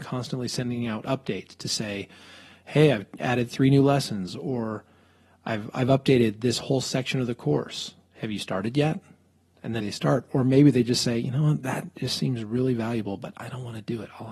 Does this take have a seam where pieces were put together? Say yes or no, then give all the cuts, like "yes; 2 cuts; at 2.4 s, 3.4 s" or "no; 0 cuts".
yes; 1 cut; at 9.8 s